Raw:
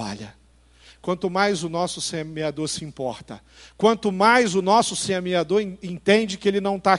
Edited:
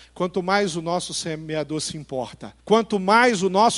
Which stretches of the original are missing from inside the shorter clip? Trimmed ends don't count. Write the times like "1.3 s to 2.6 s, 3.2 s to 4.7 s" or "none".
3.5 s to 3.7 s